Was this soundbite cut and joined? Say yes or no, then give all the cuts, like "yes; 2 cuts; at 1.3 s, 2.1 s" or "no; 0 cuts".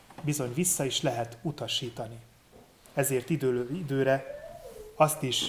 no; 0 cuts